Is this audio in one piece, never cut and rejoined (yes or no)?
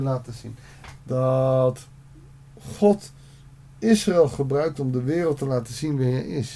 no